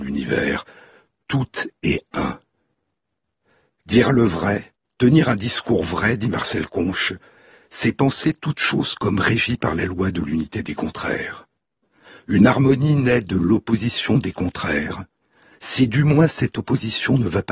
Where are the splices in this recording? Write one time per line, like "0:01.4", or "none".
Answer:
none